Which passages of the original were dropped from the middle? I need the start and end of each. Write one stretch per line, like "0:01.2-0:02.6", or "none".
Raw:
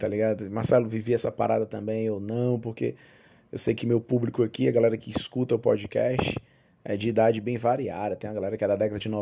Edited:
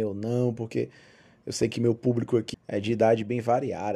0:04.6-0:06.7